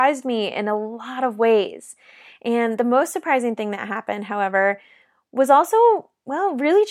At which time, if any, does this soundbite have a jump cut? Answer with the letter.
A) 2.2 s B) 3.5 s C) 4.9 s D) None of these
D